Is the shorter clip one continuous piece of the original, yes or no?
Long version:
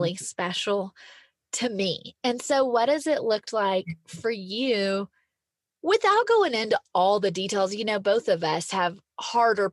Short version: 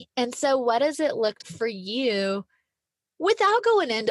no